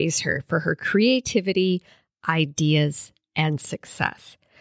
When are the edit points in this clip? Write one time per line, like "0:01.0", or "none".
none